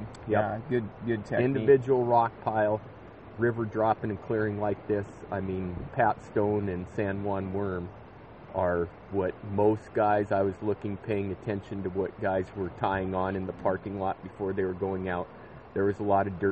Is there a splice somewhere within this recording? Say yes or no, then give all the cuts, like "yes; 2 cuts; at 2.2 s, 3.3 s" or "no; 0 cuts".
yes; 2 cuts; at 3.4 s, 5.9 s